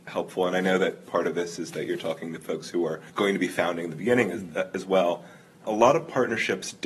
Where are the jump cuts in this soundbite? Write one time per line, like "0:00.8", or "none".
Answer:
0:03.1